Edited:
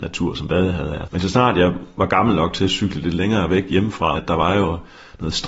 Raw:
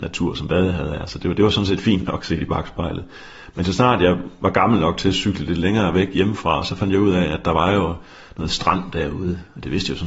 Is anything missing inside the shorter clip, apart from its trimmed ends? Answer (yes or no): yes